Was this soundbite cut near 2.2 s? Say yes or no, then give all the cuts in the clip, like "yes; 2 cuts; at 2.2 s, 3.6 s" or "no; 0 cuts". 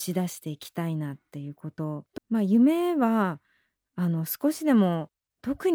yes; 1 cut; at 2.2 s